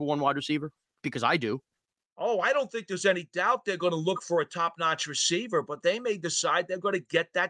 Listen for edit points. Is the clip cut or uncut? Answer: uncut